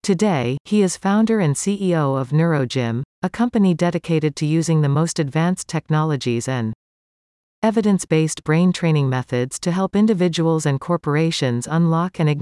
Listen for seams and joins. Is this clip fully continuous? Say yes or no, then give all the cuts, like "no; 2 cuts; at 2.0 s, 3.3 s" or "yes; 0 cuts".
yes; 0 cuts